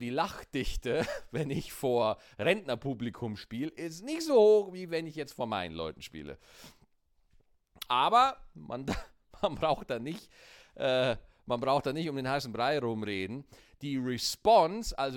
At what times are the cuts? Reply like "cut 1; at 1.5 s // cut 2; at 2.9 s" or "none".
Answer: cut 1; at 7.9 s